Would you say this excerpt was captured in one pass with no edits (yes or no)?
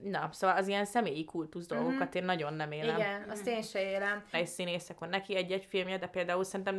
no